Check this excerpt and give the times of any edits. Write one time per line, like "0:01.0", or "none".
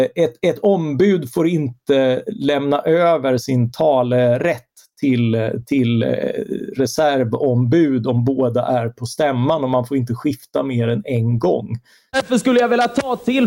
0:03.4
0:12.1